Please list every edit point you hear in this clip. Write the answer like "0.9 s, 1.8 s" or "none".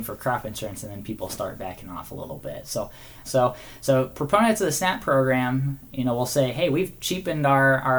3.2 s

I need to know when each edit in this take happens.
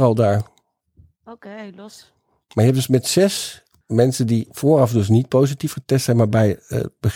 none

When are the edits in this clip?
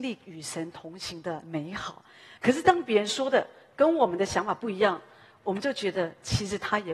2.4 s

